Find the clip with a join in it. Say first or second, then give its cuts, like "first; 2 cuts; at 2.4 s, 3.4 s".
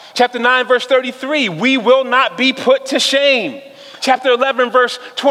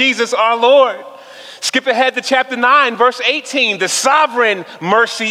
first; 1 cut; at 4.0 s